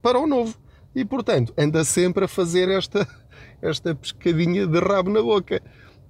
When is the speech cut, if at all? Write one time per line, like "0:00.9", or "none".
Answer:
none